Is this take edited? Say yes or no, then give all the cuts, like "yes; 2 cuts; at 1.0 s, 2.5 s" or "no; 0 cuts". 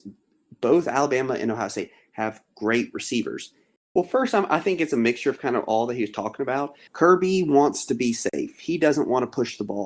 yes; 2 cuts; at 3.8 s, 6.9 s